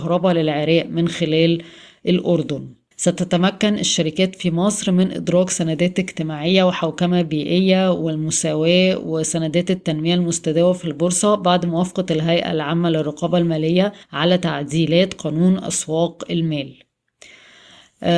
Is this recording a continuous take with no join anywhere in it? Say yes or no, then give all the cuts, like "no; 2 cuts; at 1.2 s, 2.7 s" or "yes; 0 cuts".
no; 2 cuts; at 2.9 s, 14.0 s